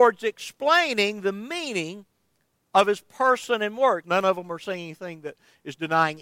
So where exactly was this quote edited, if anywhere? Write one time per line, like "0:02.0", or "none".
0:04.0